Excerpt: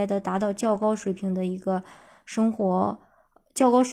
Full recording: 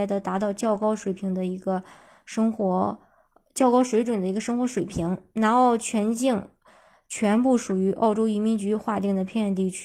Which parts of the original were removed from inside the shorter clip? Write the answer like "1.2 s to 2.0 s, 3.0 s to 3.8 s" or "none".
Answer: none

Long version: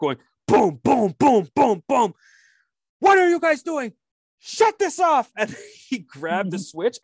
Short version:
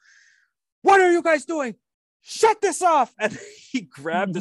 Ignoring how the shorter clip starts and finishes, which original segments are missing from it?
none

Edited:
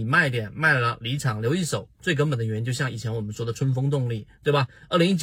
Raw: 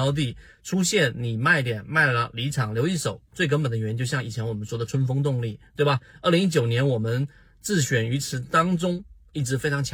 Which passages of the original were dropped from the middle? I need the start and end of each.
none

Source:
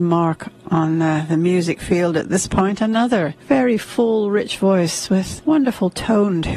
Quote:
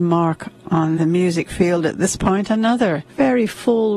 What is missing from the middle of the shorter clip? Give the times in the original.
1.0 s to 1.3 s

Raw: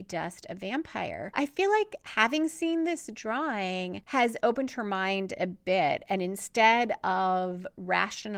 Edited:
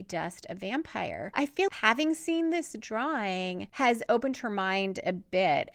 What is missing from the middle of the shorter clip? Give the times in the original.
1.7 s to 2.0 s

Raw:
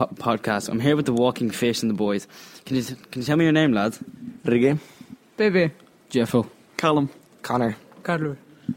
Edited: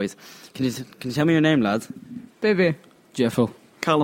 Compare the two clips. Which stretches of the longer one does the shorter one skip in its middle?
4.4 s to 5.2 s

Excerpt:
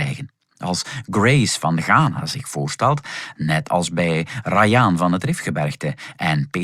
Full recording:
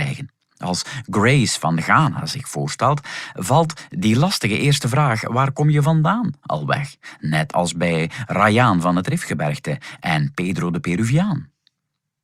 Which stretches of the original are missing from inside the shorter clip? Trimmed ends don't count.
3.3 s to 7.2 s

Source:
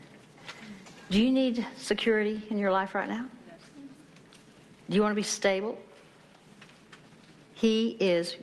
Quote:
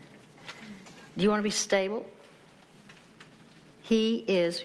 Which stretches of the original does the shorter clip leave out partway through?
1.1 s to 4.8 s

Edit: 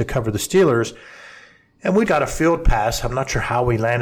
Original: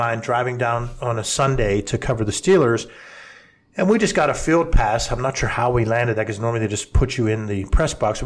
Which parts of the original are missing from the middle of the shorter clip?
4.0 s to 4.1 s

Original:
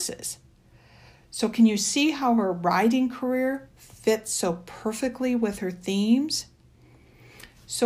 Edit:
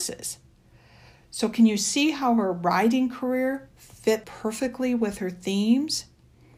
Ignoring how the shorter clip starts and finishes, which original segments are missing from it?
4.2 s to 4.6 s

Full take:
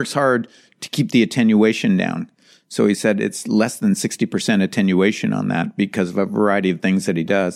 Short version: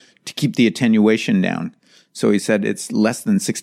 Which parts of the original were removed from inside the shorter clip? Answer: none

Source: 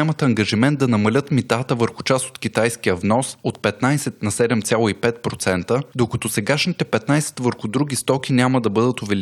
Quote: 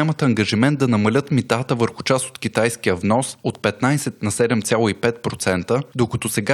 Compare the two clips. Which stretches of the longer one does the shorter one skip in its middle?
none

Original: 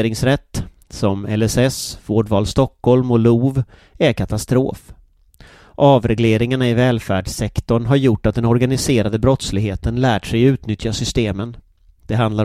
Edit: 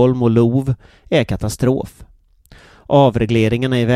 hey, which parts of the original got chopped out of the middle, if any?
none

